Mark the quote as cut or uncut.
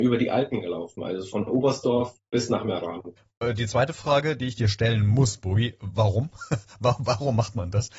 uncut